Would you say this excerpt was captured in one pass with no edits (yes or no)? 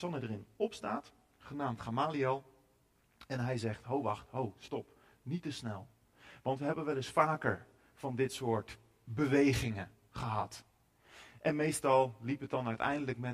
yes